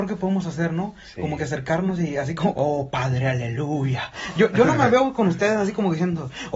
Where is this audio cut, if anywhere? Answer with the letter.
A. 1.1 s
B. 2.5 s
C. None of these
B